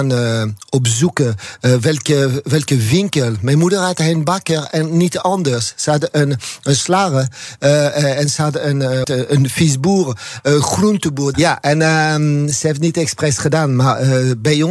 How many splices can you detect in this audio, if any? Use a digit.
2